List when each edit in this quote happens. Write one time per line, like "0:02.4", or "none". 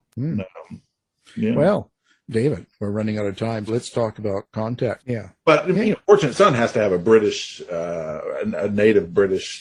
0:03.7
0:05.0